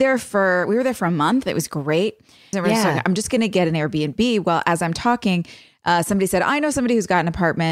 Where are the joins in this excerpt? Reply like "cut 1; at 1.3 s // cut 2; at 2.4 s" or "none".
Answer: cut 1; at 2.5 s

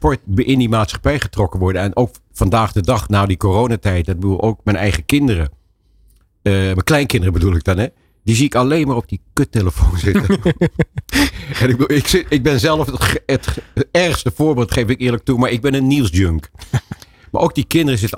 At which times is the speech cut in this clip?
none

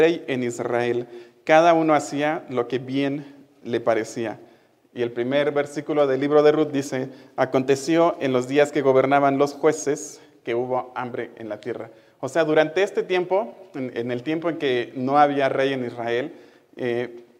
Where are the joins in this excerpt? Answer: none

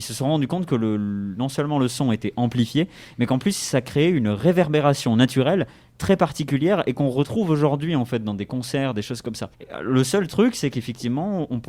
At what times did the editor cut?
none

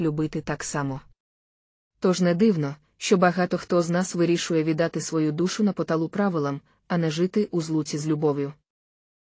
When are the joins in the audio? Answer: none

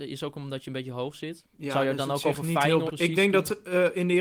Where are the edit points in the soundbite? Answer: cut 1; at 1.5 s // cut 2; at 2.9 s

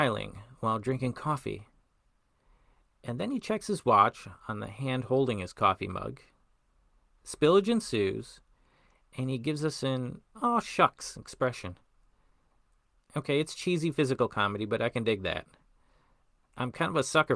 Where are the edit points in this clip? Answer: none

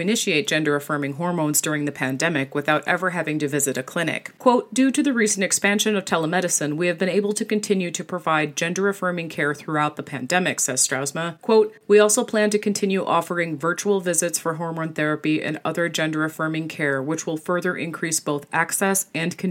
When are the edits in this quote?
cut 1; at 4.4 s

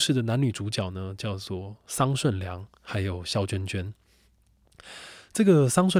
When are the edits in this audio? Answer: none

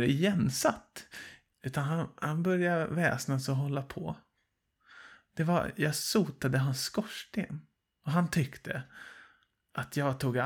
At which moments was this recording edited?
cut 1; at 1.5 s

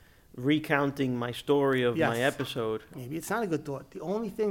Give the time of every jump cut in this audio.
cut 1; at 2.9 s

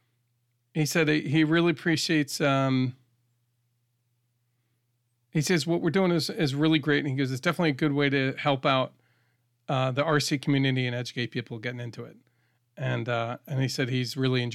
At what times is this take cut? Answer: none

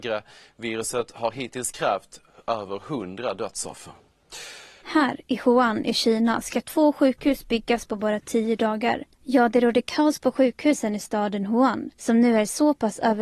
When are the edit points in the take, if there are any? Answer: cut 1; at 4.8 s // cut 2; at 9.1 s

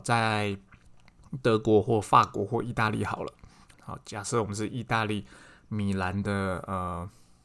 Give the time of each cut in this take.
cut 1; at 3.7 s

